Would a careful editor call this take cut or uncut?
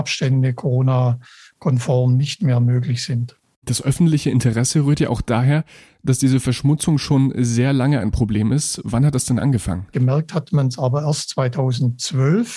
cut